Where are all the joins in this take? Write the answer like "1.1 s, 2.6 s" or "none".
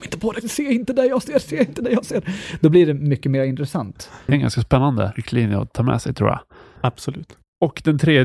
4.3 s, 6.8 s